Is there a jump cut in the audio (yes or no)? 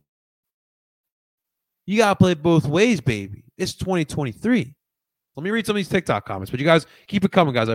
yes